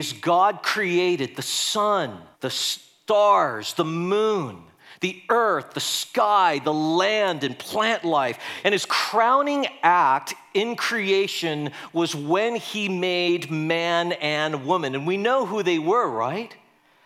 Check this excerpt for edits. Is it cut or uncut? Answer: cut